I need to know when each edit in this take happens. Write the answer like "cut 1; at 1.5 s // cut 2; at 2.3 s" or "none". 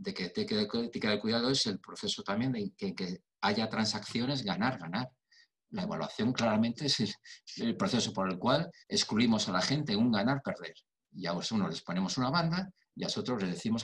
cut 1; at 8.8 s